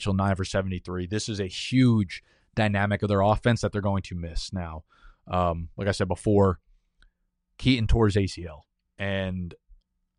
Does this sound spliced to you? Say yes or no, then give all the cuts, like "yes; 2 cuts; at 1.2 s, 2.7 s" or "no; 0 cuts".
yes; 1 cut; at 8.9 s